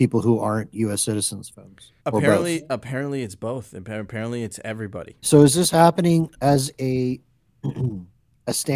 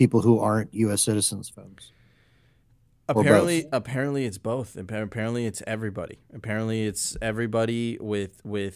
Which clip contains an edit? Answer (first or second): first